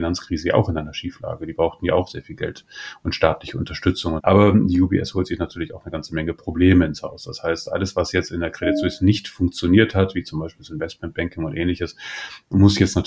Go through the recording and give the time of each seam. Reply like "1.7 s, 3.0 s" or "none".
4.2 s